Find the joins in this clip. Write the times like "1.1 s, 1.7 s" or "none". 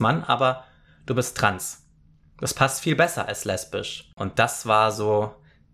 4.2 s